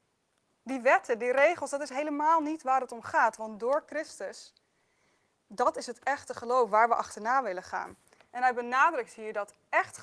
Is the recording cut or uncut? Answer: uncut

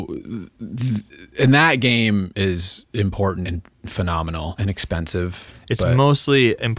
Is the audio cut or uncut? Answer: cut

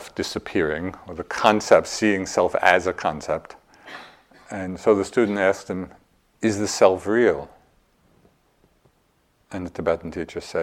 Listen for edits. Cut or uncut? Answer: uncut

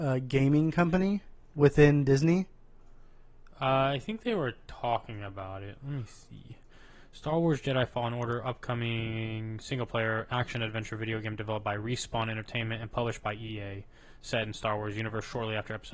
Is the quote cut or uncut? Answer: uncut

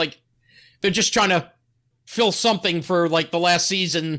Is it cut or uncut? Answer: uncut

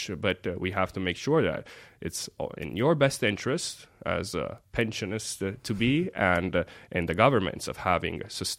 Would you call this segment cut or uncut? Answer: uncut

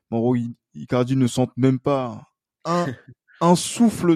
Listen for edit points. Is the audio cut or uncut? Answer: uncut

